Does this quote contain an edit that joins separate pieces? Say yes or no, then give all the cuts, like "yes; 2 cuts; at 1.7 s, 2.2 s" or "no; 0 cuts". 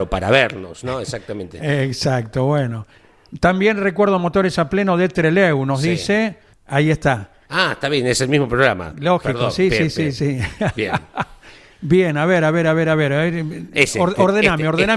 yes; 1 cut; at 6.5 s